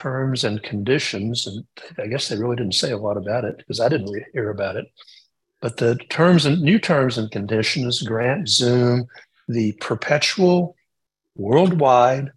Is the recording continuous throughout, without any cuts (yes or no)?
yes